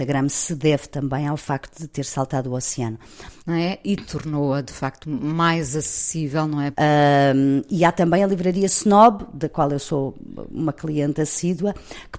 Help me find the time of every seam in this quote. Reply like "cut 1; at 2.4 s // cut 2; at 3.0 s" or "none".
cut 1; at 3.4 s // cut 2; at 6.7 s